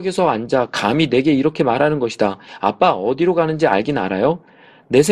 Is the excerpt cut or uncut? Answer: uncut